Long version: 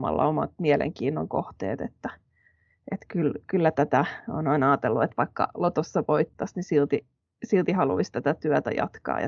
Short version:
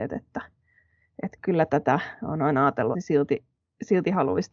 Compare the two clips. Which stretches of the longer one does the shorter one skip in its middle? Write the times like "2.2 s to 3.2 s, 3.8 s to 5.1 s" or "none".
3.1 s to 3.4 s, 5.0 s to 6.5 s